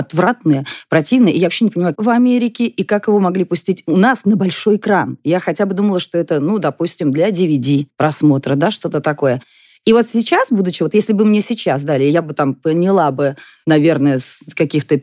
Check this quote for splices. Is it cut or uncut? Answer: cut